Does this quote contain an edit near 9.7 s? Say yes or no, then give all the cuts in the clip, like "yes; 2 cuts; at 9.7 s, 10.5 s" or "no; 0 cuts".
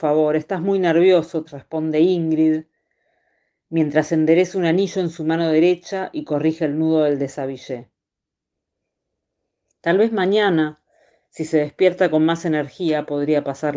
yes; 2 cuts; at 1.5 s, 9.7 s